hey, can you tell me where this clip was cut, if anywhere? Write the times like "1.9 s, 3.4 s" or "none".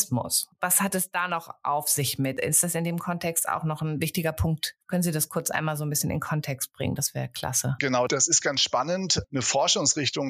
9.2 s